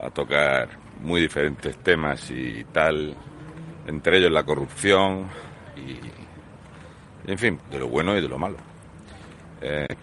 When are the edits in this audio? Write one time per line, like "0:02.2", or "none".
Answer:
0:07.6